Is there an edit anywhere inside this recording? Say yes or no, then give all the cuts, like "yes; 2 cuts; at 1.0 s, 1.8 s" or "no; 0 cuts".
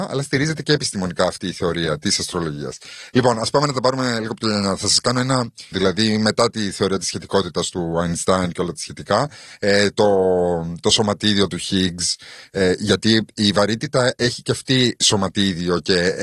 yes; 1 cut; at 5.7 s